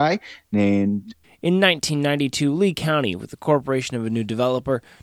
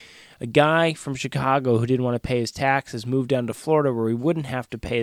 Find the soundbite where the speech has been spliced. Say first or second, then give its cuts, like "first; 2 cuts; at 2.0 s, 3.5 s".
first; 1 cut; at 1.2 s